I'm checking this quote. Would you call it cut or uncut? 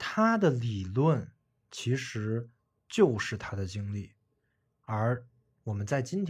uncut